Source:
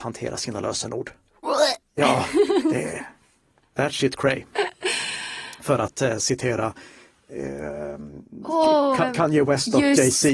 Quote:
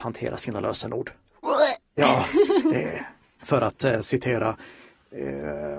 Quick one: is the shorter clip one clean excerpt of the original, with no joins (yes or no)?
no